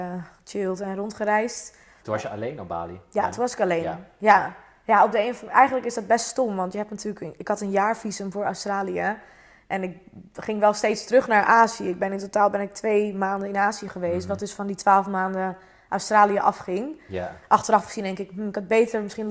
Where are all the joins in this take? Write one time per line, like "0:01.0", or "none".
0:02.0